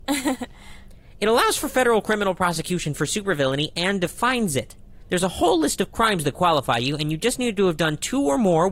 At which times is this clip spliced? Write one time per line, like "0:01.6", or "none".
none